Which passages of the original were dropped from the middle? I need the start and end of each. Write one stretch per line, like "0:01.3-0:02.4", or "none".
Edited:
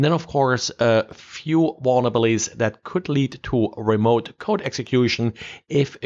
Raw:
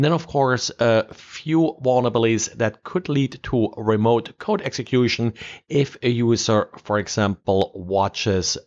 none